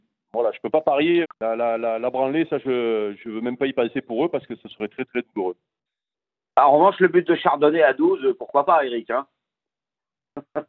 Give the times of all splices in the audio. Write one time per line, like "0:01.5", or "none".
0:01.2